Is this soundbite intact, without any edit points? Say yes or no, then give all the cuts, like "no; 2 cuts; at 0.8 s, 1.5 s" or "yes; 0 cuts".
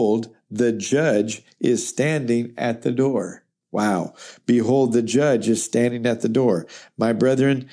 yes; 0 cuts